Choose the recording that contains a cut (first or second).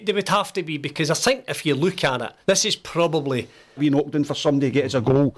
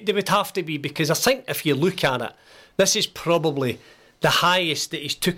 first